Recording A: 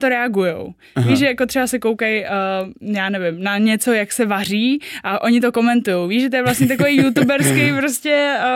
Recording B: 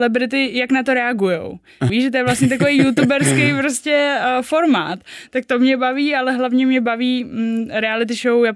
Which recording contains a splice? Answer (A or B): B